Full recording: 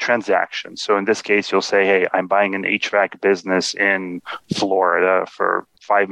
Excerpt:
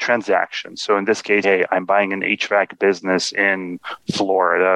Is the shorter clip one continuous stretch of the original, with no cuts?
no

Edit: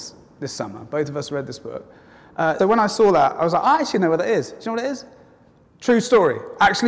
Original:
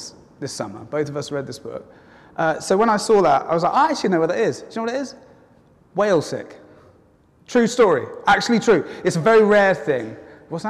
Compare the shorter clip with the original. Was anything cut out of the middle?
yes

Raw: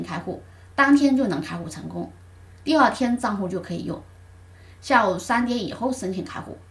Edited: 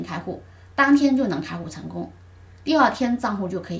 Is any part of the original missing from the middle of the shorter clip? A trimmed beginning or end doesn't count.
no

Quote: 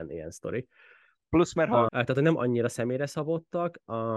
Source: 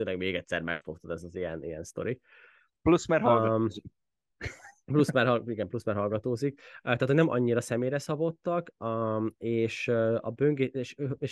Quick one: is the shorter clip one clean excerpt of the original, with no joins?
no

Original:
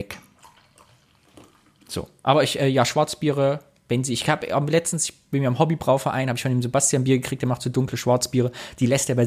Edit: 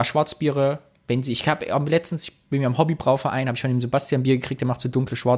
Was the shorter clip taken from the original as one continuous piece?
yes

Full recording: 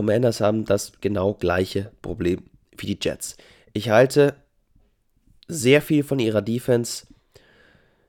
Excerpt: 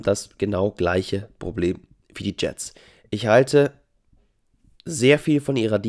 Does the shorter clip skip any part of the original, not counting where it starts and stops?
no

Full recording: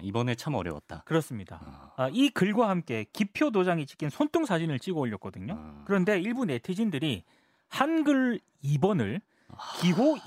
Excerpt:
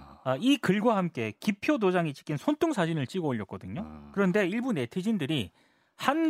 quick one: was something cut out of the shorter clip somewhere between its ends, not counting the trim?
no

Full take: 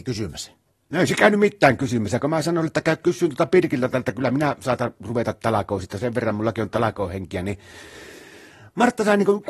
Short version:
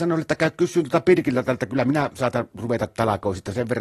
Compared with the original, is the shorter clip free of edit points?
yes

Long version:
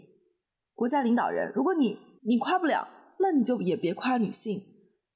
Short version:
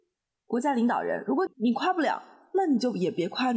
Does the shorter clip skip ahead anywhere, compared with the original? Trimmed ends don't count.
yes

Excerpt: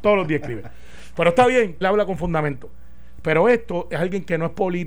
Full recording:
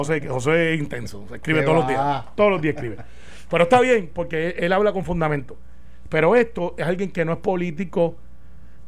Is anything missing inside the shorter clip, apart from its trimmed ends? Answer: yes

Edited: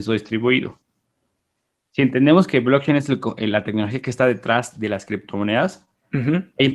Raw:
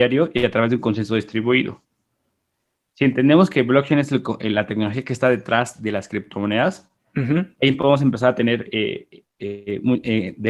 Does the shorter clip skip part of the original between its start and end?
no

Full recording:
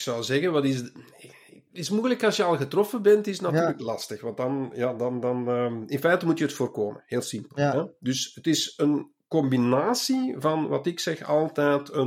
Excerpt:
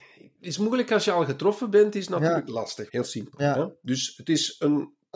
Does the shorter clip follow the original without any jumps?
no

